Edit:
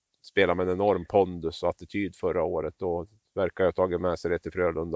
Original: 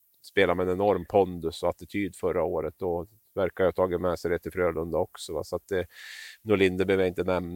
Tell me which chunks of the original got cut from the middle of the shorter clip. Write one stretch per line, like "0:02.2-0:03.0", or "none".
none